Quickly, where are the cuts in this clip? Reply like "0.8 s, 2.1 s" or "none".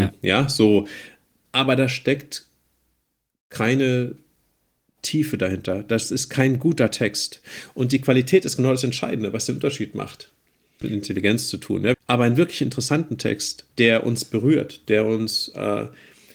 10.8 s, 11.9 s, 13.7 s